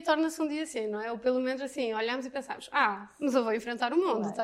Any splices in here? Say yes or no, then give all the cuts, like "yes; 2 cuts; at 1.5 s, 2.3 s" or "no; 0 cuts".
no; 0 cuts